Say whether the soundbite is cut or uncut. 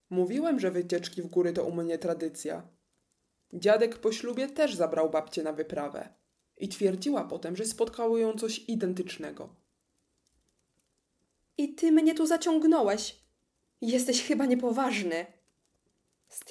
uncut